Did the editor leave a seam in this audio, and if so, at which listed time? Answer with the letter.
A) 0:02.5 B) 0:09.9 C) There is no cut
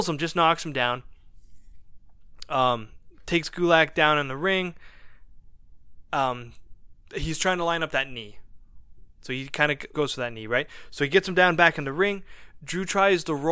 B